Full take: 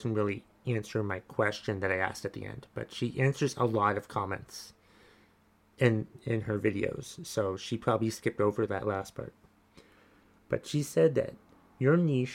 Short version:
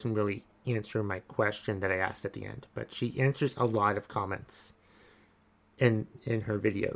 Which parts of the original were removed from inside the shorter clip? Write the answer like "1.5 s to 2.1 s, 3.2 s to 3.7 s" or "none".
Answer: none